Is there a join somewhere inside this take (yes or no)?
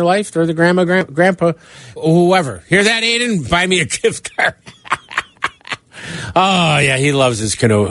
yes